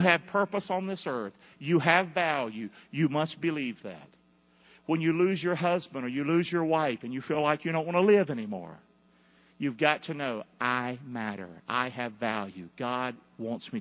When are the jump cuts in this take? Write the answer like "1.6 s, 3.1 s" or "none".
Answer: none

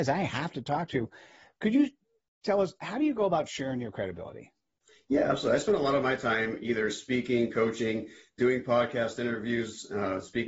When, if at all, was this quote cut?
none

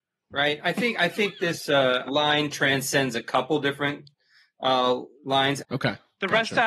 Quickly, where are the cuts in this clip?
2.1 s, 5.6 s

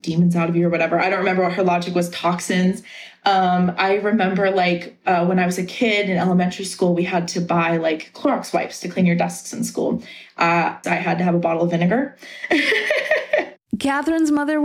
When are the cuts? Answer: 10.8 s

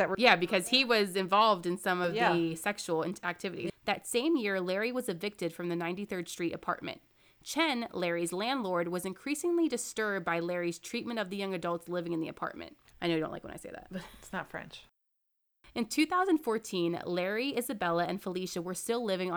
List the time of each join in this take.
3.7 s, 12.9 s

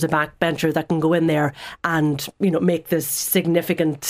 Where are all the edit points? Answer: none

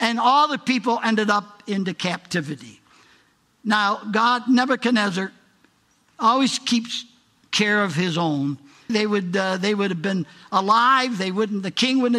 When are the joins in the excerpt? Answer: 8.9 s

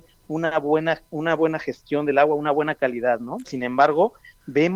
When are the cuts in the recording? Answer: 3.4 s

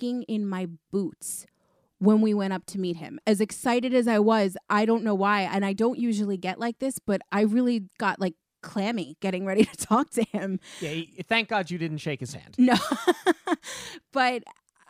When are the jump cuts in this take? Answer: 4.7 s, 7.3 s

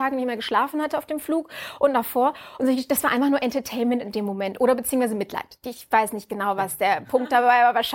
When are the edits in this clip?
none

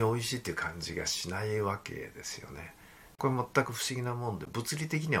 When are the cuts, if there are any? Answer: none

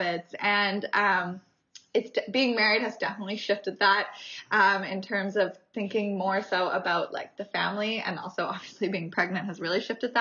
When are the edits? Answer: none

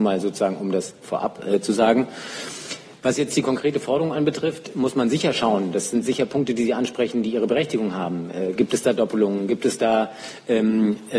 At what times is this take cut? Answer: none

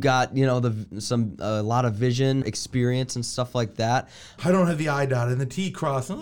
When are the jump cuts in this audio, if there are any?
2.4 s, 4.4 s

